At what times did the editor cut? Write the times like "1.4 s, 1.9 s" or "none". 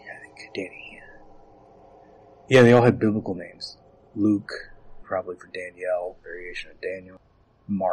5.0 s